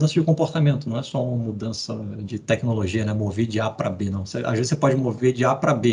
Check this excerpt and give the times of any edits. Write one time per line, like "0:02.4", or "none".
none